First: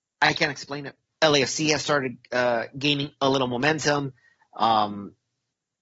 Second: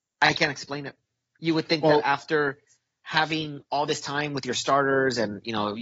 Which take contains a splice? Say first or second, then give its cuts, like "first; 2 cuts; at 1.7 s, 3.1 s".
first; 1 cut; at 1.1 s